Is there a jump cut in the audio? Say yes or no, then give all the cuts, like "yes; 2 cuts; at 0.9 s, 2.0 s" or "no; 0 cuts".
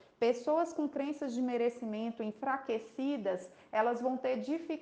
no; 0 cuts